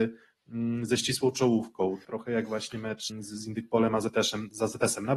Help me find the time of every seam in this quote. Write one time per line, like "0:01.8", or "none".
0:02.0
0:03.1